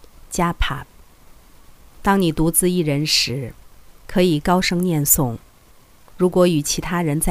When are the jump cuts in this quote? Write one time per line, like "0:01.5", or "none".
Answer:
none